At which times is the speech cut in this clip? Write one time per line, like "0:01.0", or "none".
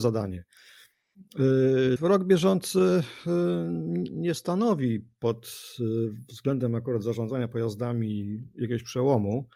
0:02.0